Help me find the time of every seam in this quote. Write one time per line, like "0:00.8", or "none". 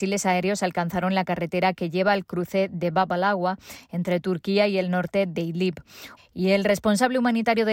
0:06.2